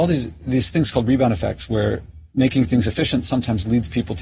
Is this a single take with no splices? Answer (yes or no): yes